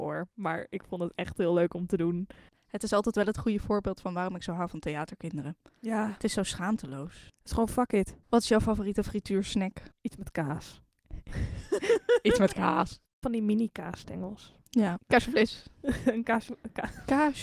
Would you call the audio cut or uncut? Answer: cut